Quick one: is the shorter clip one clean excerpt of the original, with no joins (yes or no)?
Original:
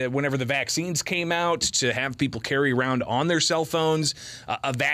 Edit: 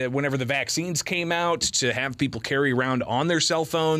yes